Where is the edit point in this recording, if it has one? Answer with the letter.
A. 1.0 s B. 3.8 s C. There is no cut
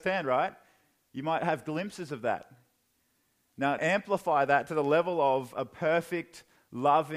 B